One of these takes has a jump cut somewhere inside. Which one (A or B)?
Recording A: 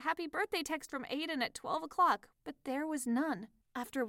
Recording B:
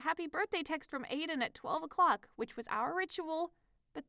A